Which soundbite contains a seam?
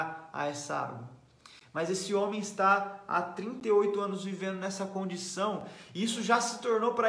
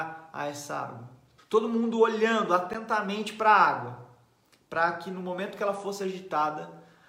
second; 1 cut; at 1.4 s

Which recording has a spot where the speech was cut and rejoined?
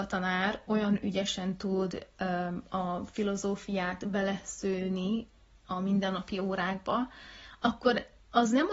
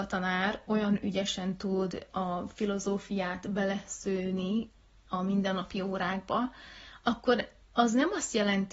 second; 1 cut; at 2.1 s

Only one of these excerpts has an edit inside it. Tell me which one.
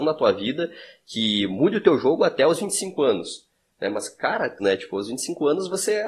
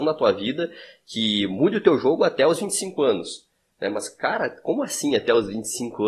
first; 1 cut; at 4.6 s

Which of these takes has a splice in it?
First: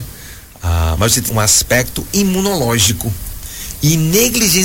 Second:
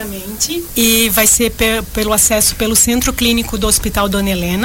first; 1 cut; at 1.3 s

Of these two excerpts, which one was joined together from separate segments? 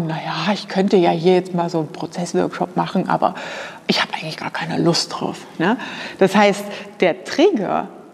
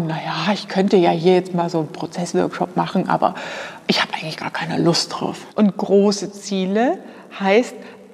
second; 1 cut; at 5.5 s

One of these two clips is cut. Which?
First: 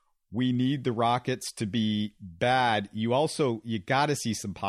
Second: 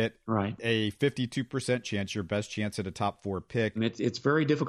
second; 1 cut; at 3.8 s

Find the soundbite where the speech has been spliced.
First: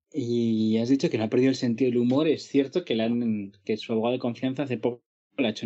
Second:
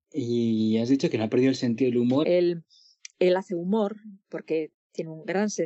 second; 1 cut; at 2.2 s

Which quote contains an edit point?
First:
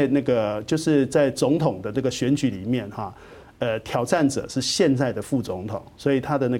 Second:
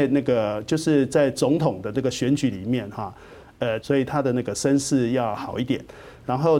second; 1 cut; at 3.8 s

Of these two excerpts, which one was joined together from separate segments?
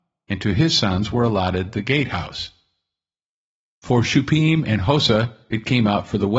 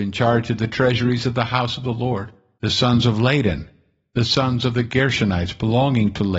second; 1 cut; at 2.6 s

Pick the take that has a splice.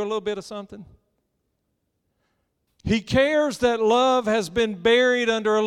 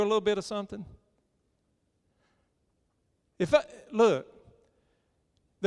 first; 1 cut; at 2.7 s

